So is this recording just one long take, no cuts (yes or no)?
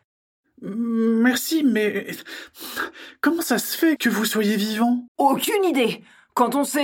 no